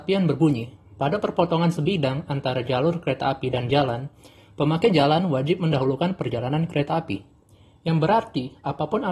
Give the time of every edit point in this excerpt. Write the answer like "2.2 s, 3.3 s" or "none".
none